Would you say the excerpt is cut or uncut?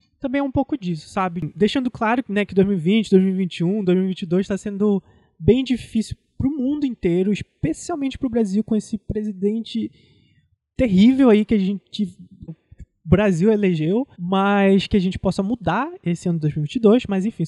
cut